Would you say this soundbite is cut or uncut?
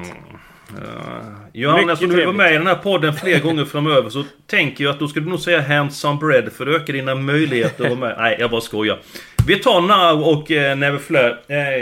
uncut